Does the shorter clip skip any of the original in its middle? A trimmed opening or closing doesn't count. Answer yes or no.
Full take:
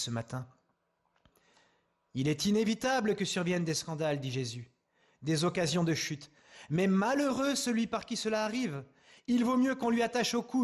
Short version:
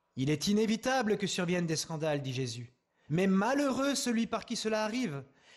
yes